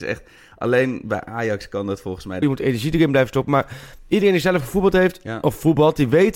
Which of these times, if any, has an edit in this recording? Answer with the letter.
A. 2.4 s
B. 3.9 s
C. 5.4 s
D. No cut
A